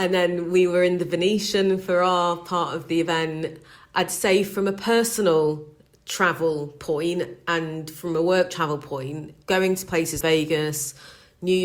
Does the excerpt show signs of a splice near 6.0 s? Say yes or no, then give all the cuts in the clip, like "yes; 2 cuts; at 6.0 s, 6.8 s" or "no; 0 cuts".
no; 1 cut; at 10.2 s